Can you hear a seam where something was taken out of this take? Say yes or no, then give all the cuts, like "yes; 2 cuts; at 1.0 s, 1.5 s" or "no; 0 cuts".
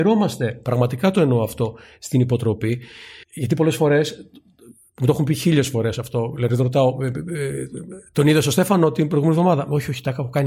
yes; 1 cut; at 3.2 s